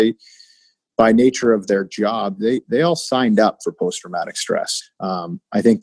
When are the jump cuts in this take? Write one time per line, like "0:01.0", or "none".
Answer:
0:04.8

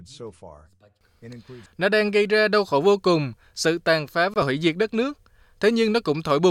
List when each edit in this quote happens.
0:01.7

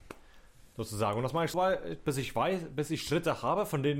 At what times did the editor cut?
0:01.5

